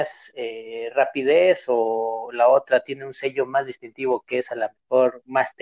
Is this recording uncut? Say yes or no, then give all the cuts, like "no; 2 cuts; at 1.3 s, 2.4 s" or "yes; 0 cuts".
yes; 0 cuts